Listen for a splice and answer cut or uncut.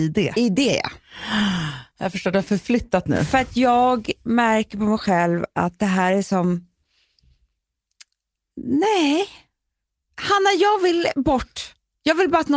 uncut